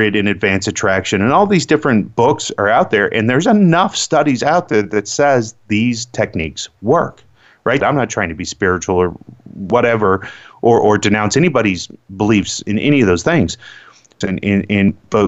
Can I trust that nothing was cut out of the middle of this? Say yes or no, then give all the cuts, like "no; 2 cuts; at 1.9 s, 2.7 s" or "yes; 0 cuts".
no; 2 cuts; at 7.8 s, 14.2 s